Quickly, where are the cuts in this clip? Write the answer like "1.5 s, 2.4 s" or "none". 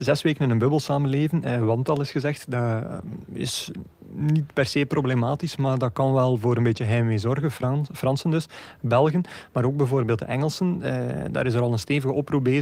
none